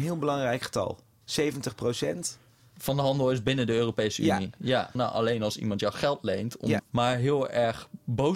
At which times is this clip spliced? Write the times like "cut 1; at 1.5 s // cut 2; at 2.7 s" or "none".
cut 1; at 5.0 s // cut 2; at 6.8 s